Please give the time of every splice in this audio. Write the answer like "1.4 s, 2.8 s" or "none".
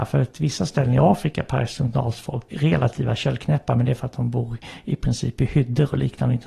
2.5 s